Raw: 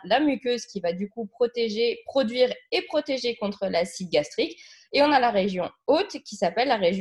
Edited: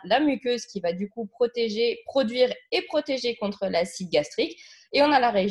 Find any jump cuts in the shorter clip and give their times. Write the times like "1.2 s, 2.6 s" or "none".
none